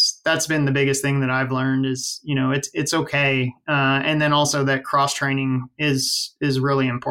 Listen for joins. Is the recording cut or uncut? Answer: uncut